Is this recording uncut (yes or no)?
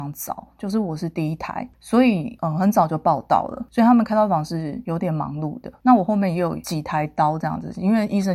yes